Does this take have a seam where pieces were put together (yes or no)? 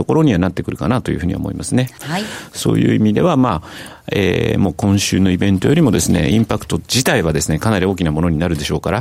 yes